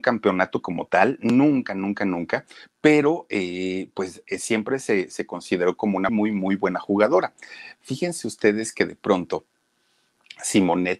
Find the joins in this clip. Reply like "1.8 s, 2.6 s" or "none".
6.1 s